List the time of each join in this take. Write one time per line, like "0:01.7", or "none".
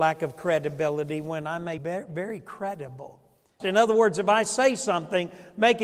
0:01.8
0:03.6